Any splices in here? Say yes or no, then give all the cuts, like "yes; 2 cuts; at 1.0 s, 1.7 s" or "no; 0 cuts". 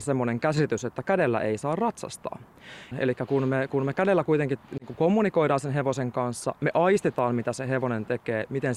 yes; 1 cut; at 2.9 s